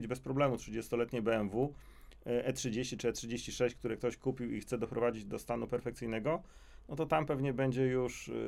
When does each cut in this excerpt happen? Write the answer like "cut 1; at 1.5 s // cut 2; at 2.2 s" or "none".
none